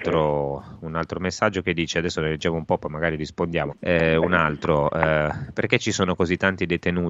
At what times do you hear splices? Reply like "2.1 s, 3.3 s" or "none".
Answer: 3.7 s